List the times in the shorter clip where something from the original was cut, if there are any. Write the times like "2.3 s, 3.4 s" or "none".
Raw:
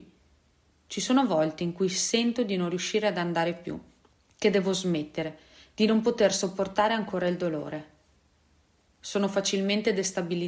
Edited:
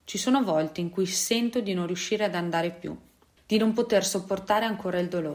3.4 s